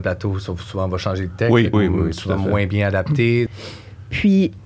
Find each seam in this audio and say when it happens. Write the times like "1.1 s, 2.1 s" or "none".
1.7 s, 3.5 s